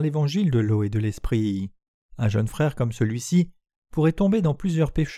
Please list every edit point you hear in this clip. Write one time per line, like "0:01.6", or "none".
0:02.0

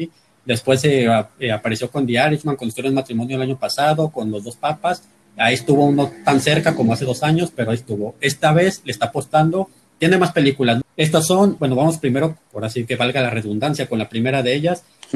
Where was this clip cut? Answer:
0:10.8

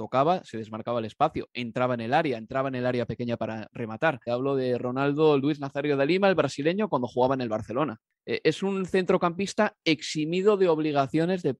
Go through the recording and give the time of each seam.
0:04.3
0:08.2

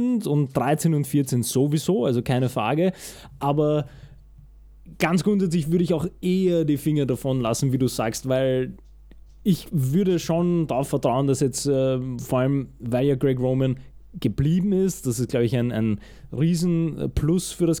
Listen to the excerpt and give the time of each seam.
none

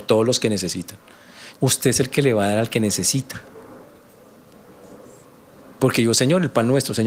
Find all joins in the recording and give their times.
0:01.5
0:05.8

